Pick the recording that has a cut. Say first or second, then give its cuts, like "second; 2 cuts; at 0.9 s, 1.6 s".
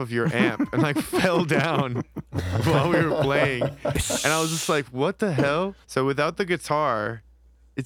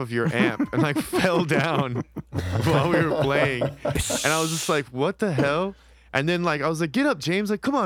first; 1 cut; at 5.8 s